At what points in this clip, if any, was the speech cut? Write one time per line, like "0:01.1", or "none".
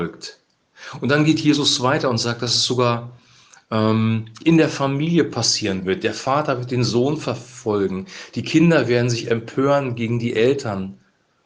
none